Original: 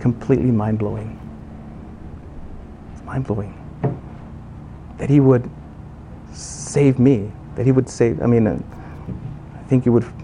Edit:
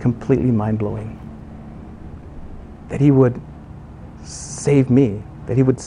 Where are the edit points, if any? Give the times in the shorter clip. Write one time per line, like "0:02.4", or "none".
0:02.8